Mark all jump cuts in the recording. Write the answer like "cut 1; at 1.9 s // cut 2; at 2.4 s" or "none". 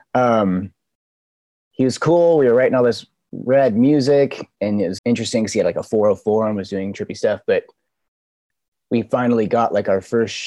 cut 1; at 5.0 s